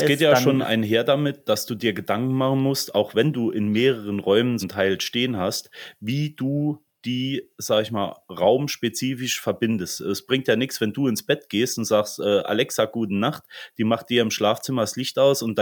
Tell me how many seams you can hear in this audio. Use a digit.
1